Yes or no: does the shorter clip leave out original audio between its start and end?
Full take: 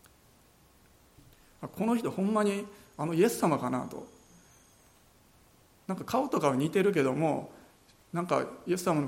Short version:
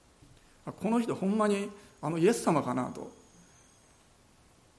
no